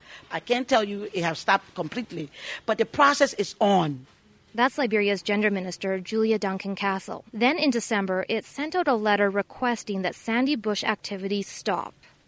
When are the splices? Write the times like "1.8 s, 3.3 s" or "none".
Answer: 7.3 s